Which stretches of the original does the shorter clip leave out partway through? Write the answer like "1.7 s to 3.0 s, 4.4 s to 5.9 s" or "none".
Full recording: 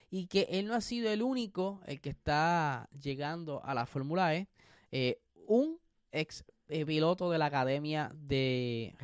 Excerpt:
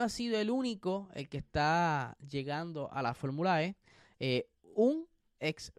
none